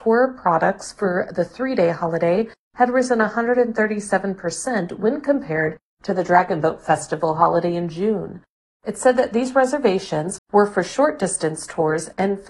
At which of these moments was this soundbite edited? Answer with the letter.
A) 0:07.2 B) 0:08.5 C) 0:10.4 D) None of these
C